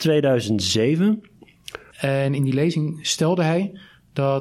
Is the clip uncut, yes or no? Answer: no